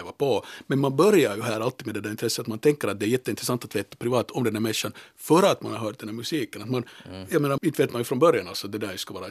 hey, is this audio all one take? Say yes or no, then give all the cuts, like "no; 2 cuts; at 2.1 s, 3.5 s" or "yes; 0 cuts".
no; 1 cut; at 7.6 s